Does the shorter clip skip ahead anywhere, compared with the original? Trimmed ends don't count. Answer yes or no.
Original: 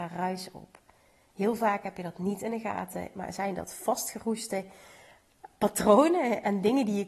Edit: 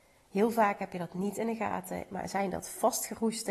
no